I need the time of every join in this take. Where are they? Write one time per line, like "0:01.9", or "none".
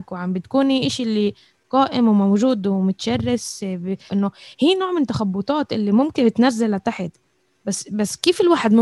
0:04.1